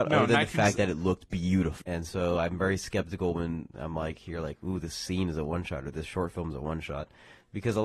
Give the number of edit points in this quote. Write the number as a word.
one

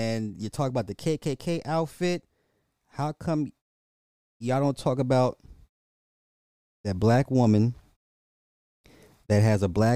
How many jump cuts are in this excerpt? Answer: zero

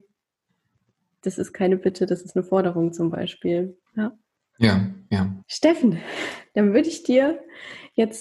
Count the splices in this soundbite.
two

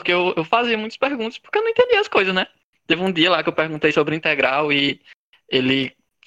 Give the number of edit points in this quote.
zero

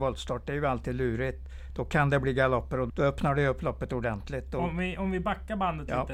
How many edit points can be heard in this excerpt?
one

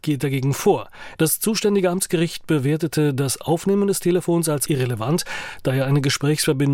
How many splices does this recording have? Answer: one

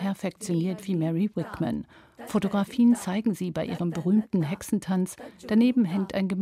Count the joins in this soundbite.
zero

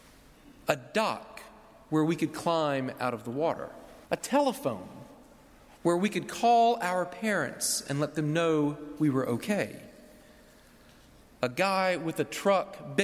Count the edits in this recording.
one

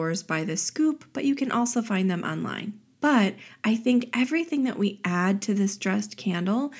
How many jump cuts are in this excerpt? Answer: one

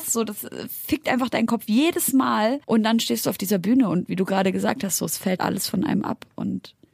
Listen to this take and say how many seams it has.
two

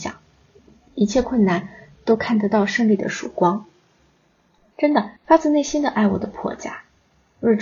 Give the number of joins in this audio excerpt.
one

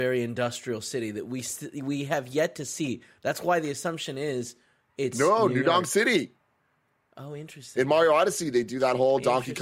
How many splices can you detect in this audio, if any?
zero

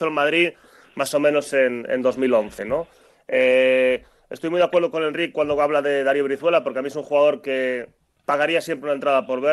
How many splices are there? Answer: zero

